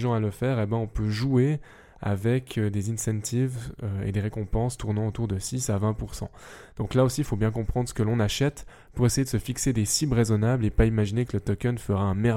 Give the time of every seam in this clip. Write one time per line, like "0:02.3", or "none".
none